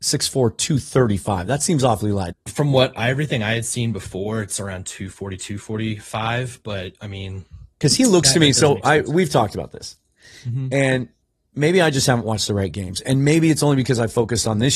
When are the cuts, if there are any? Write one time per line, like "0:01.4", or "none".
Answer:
0:02.3

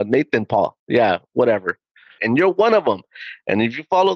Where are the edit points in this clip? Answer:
0:02.2

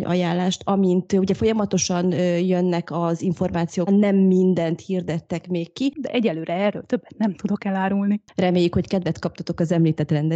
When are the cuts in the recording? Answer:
0:03.9
0:05.9

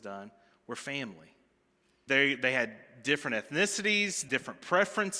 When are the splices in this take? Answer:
0:02.1
0:04.3

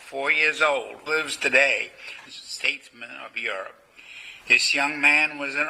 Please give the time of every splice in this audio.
0:01.1
0:02.3
0:04.4

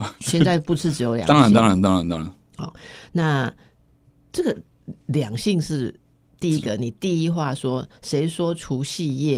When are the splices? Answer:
none

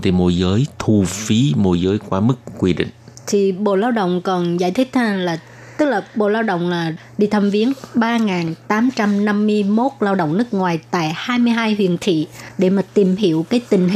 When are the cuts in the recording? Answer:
none

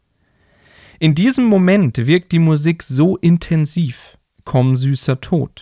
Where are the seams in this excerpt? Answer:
0:04.3

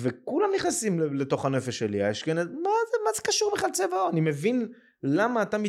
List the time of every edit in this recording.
none

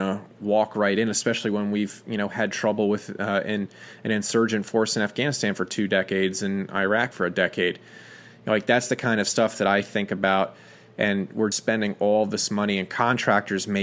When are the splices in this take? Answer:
0:11.5

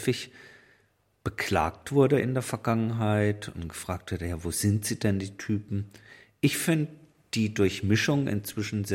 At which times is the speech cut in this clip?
none

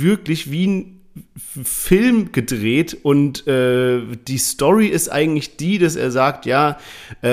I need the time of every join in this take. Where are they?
none

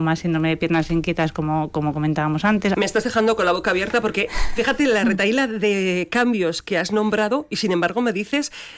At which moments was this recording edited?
0:02.7

